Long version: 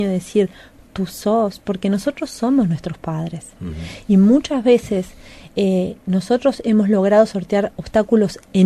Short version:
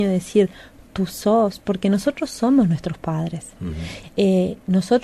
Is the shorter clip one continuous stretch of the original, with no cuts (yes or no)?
no